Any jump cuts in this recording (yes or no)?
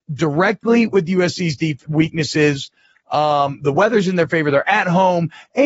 yes